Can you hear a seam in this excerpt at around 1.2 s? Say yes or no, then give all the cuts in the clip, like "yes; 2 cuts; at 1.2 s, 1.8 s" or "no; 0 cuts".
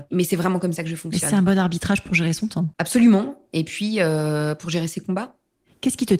no; 1 cut; at 2.7 s